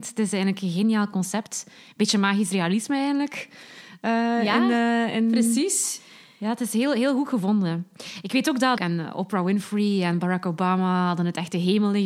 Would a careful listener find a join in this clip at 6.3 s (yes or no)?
no